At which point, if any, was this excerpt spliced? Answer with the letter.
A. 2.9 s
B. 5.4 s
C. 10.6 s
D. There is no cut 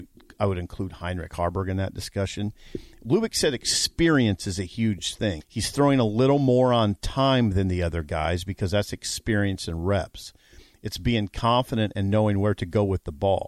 B